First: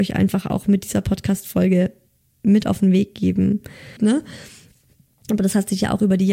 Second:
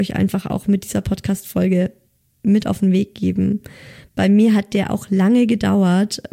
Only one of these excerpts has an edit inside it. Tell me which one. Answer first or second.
first